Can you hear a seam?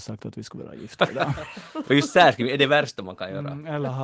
no; 0 cuts

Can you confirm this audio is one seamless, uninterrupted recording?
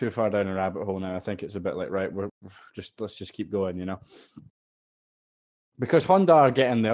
yes; 0 cuts

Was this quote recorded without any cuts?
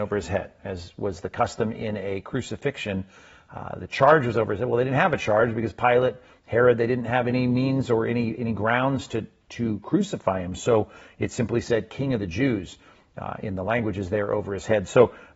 yes; 0 cuts

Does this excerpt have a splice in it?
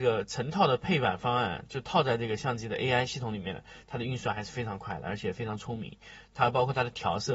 no; 0 cuts

